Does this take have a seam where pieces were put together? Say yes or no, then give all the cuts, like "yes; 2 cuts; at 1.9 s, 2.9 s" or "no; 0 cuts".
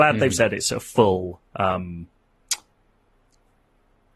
yes; 1 cut; at 1.5 s